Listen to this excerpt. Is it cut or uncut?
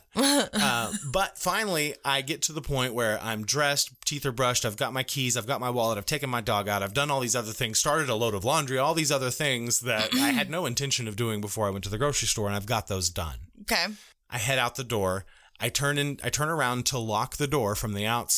uncut